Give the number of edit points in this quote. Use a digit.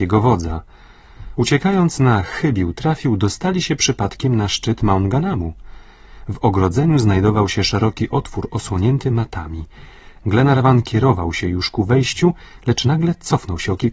0